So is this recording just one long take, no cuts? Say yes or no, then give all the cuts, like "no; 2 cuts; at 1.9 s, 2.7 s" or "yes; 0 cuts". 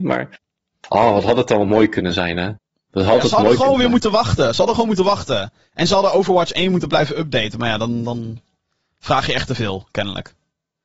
yes; 0 cuts